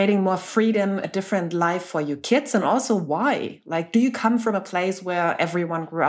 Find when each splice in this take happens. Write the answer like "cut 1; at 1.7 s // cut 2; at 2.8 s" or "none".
none